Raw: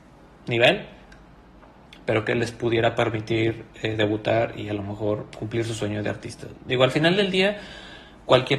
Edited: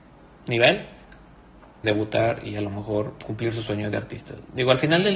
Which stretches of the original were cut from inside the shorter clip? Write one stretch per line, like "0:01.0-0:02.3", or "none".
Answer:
0:01.8-0:04.0